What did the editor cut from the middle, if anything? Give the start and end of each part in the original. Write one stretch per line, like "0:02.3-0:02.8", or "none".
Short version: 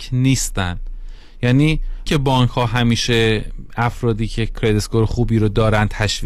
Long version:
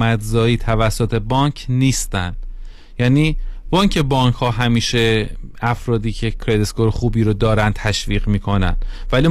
0:03.6-0:03.9